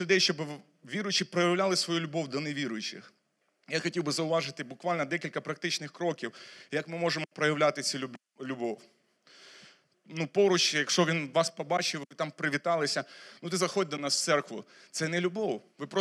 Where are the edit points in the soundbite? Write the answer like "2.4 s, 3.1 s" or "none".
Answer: 9.9 s